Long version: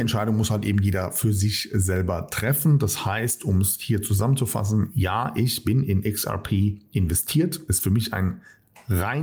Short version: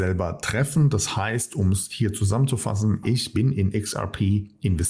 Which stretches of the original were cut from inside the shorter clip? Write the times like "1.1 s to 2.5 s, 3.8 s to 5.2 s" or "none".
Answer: 4.9 s to 5.3 s